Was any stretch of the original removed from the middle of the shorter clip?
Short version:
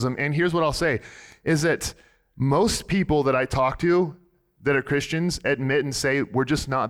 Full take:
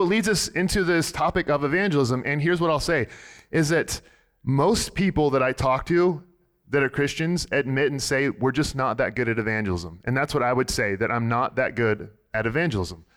no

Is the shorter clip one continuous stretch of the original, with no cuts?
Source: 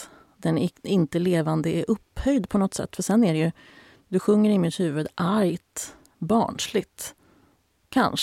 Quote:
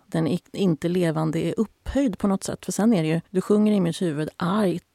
no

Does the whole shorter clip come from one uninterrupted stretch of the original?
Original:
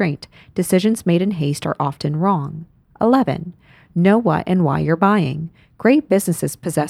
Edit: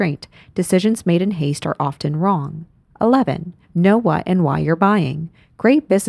no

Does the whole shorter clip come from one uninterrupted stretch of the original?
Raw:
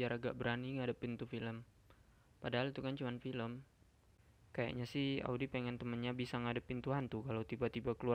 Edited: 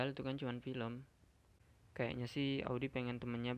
yes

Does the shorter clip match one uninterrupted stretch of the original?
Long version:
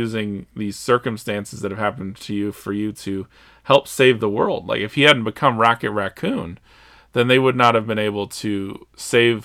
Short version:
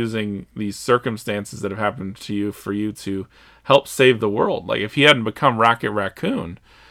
yes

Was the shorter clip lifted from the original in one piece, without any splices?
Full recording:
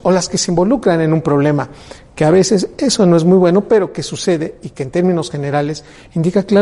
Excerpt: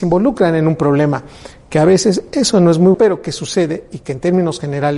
no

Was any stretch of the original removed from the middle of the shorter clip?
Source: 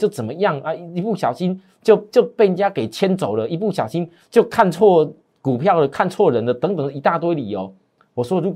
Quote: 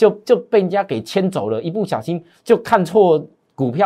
no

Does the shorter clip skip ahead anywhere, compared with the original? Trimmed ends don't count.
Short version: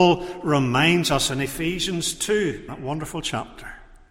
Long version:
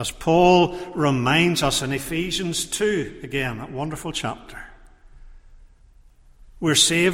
yes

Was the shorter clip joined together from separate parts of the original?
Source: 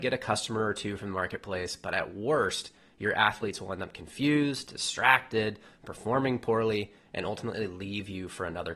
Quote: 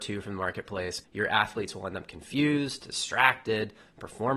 yes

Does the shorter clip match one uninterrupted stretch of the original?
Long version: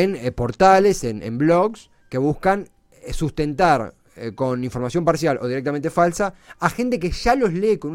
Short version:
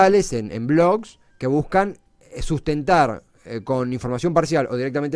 yes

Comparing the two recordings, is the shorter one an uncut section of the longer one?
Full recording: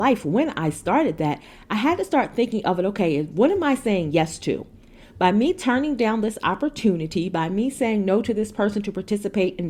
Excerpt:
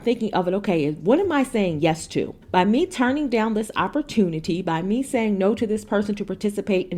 no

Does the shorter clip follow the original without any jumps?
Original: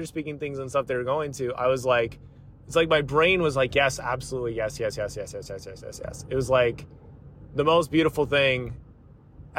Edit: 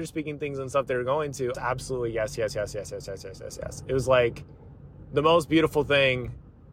no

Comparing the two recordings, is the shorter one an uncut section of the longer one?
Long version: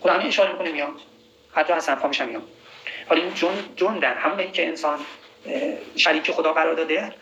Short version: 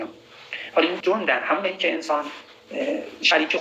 no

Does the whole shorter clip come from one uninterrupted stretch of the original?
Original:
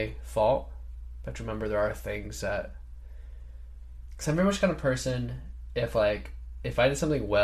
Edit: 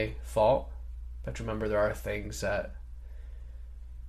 yes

